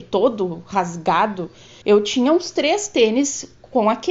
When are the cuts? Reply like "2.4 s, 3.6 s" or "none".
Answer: 1.8 s

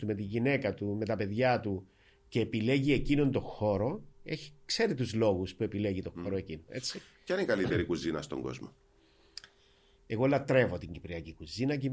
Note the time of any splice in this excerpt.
10.0 s

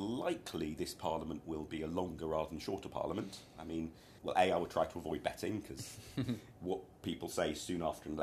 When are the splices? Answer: 4.2 s

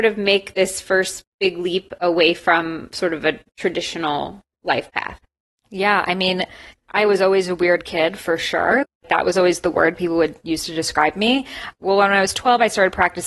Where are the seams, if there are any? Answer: none

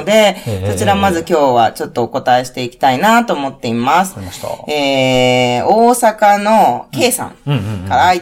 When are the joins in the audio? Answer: none

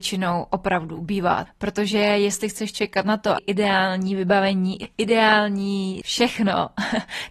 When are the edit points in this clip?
1.5 s, 3.4 s

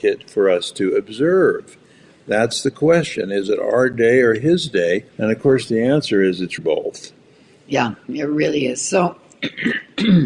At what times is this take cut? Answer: 5.1 s, 6.6 s

